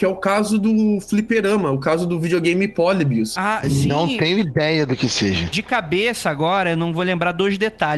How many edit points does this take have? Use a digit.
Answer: 1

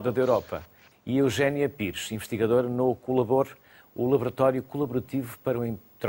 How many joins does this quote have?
1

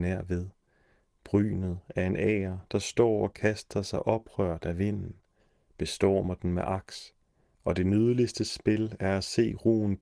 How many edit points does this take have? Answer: 1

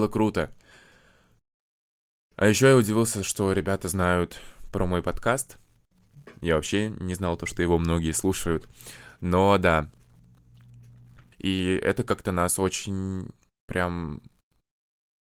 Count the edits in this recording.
1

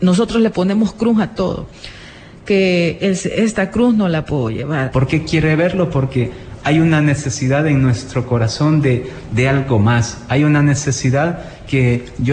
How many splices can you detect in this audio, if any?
1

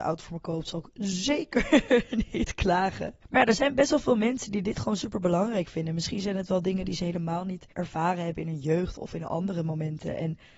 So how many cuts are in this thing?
2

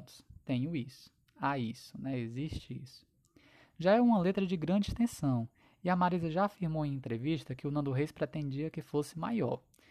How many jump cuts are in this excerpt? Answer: 0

